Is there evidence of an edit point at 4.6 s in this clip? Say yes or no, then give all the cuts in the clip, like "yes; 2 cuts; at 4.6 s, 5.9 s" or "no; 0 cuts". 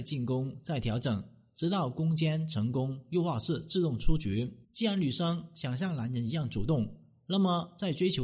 yes; 1 cut; at 4.6 s